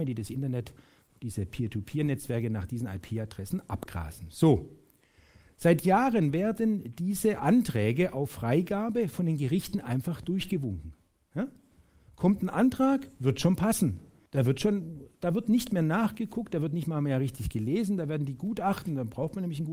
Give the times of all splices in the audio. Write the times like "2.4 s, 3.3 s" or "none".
14.3 s

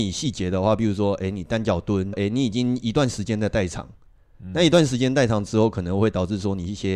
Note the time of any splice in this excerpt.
2.1 s

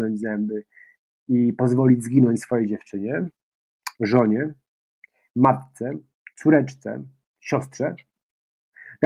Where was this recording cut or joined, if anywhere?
none

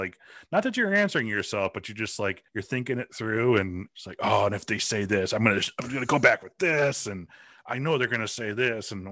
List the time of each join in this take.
2.5 s

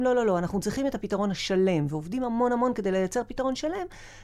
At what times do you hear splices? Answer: none

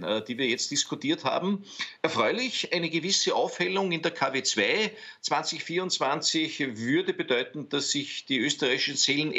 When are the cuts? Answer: none

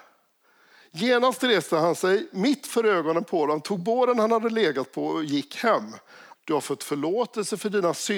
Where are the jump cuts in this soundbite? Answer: 6.4 s

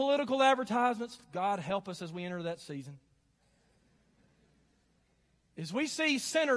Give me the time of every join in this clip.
none

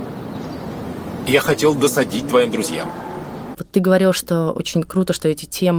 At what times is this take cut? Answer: 3.5 s

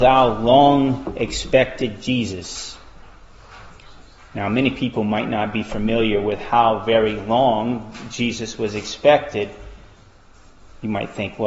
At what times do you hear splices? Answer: none

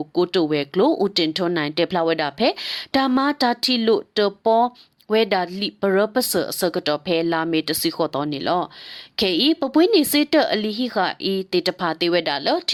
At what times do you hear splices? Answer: none

